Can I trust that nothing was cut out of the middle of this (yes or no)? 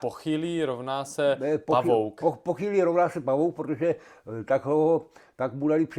yes